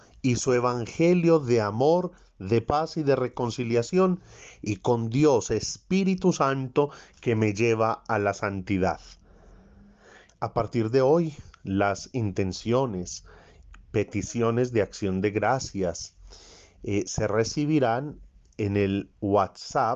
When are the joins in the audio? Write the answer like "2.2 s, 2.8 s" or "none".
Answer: 10.3 s